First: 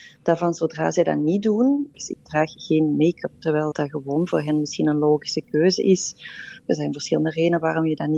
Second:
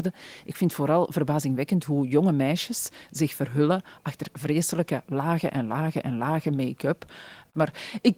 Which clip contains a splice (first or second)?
first